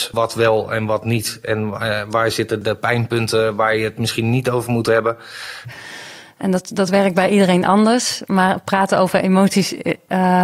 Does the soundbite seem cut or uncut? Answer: cut